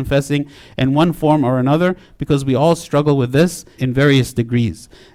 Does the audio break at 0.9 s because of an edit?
no; 1 cut; at 3.8 s

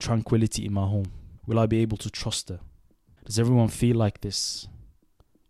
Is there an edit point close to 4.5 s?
no; 2 cuts; at 1.4 s, 3.1 s

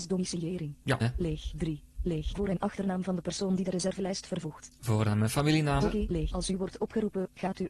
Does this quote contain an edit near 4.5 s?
no; 3 cuts; at 1.0 s, 2.3 s, 5.8 s

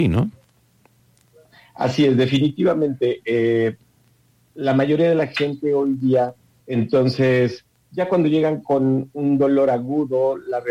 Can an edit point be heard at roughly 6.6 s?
yes; 1 cut; at 6.6 s

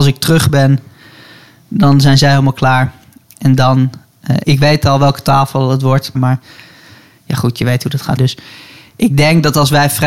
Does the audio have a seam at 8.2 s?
yes; 3 cuts; at 4.4 s, 6.1 s, 8.2 s

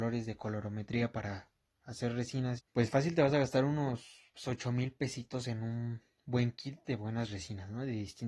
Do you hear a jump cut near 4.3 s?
yes; 2 cuts; at 2.6 s, 4.3 s

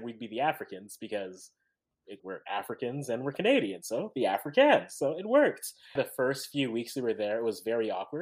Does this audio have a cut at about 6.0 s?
yes; 2 cuts; at 2.2 s, 6.0 s

